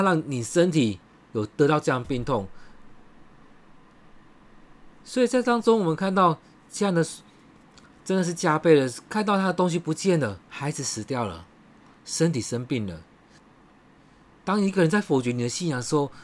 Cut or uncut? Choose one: cut